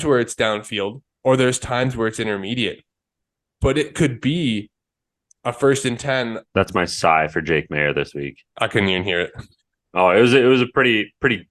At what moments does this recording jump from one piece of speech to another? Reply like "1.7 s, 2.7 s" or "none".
6.4 s, 8.5 s